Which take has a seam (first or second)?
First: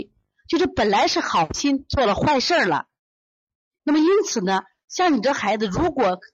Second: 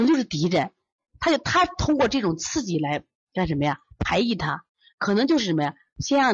second